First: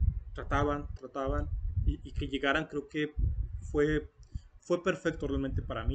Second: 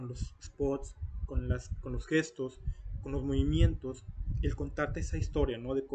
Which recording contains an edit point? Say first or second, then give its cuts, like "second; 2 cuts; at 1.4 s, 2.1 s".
first; 1 cut; at 1.0 s